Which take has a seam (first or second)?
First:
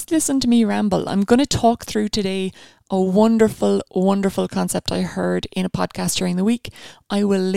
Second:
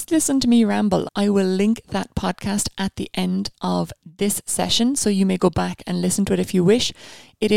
second